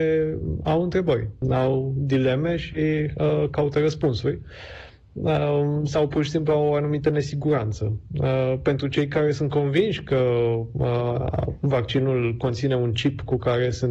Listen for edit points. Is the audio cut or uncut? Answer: cut